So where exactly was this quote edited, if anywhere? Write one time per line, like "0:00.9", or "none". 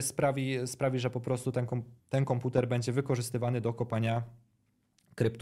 0:02.0